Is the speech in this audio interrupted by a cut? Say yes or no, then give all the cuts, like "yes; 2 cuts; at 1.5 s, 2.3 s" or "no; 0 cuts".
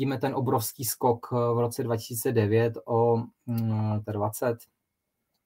yes; 1 cut; at 4.0 s